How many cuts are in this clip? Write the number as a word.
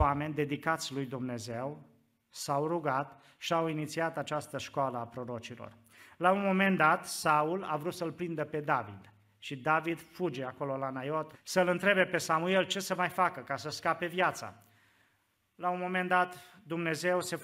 one